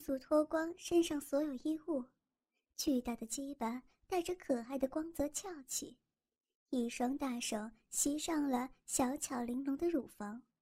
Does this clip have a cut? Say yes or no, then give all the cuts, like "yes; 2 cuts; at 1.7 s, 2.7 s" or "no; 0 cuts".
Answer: no; 0 cuts